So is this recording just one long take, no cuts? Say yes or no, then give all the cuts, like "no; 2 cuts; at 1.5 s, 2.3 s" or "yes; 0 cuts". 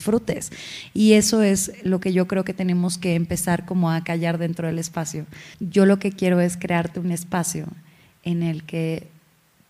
no; 1 cut; at 5.5 s